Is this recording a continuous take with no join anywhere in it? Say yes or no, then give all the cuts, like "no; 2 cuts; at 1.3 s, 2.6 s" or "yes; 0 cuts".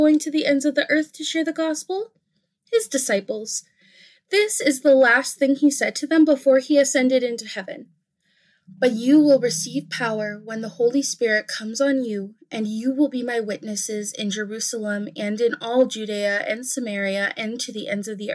yes; 0 cuts